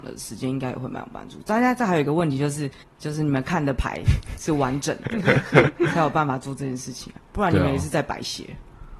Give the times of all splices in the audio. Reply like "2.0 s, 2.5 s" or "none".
2.8 s